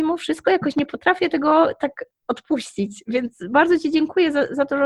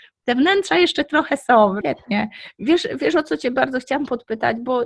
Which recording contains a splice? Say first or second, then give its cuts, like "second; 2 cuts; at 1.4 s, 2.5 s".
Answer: second; 1 cut; at 1.8 s